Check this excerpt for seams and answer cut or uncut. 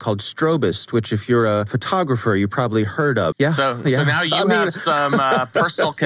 cut